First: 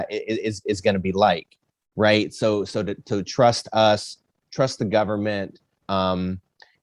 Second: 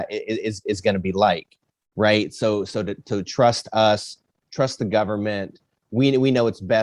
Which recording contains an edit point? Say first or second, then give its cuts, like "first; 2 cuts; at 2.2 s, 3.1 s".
first; 1 cut; at 5.8 s